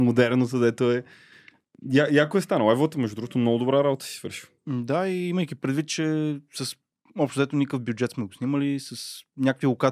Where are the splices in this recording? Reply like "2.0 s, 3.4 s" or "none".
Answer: none